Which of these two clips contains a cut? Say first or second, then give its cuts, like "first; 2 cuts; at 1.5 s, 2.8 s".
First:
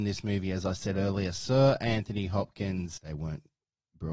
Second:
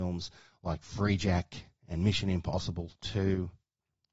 first; 1 cut; at 3.0 s